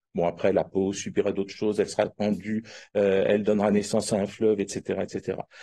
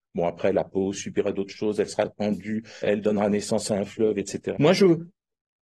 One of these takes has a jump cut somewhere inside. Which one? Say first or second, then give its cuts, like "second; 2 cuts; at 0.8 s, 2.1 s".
second; 2 cuts; at 2.8 s, 4.5 s